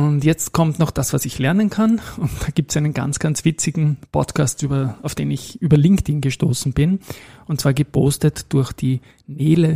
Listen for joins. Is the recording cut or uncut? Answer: uncut